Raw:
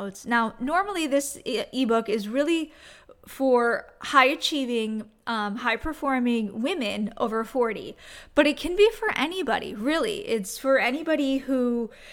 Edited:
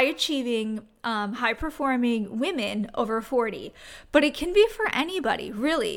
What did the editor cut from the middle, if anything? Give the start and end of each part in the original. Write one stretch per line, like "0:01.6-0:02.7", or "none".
none